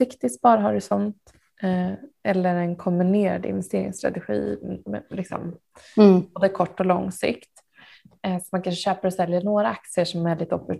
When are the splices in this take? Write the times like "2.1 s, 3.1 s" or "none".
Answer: none